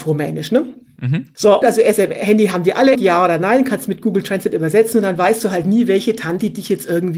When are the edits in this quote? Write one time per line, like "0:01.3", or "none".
0:01.6
0:02.9